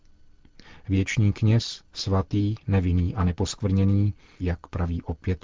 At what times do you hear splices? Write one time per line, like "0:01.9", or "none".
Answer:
0:04.4

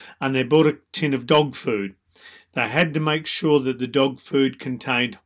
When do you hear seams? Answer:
none

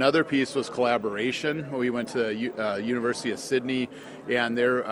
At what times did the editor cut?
none

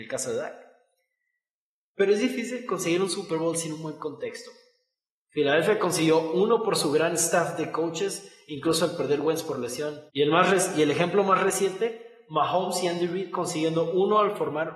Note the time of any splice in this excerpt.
0:05.2
0:10.1

